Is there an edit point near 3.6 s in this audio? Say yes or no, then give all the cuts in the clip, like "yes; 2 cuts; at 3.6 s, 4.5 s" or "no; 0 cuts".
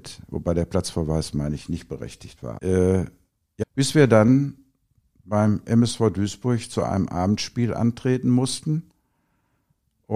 yes; 2 cuts; at 2.6 s, 3.6 s